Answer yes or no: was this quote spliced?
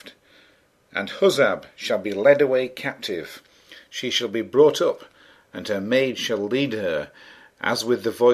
no